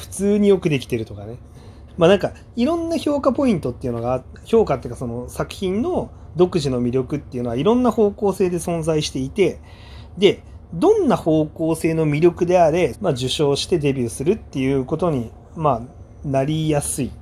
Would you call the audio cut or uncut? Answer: cut